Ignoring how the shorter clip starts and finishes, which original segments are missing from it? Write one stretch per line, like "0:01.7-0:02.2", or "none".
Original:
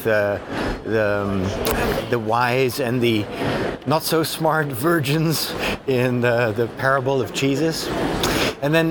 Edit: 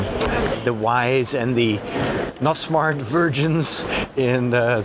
0:04.0-0:04.3